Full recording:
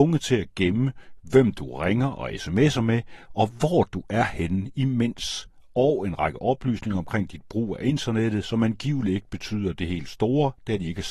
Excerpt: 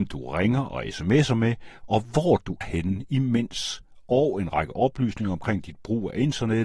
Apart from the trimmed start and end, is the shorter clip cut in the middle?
yes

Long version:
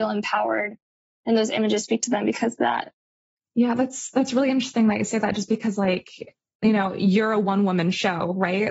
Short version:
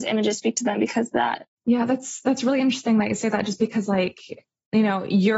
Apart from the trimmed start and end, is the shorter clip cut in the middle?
yes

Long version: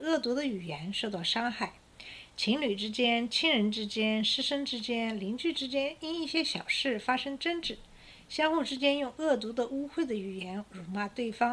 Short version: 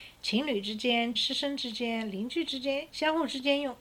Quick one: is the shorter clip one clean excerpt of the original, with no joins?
no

